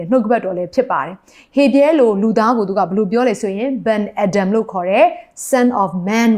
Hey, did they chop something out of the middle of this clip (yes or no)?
no